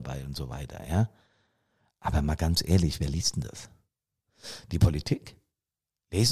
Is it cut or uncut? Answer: uncut